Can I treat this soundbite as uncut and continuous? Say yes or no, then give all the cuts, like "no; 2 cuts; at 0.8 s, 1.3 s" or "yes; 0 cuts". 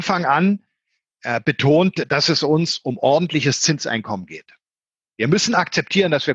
yes; 0 cuts